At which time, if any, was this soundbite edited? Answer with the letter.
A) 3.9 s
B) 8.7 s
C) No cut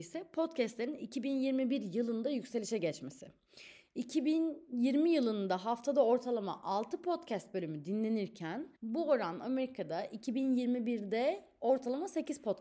B